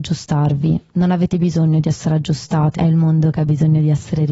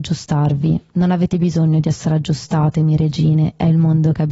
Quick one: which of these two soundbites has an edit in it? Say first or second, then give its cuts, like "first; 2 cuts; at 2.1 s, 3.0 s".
first; 1 cut; at 2.7 s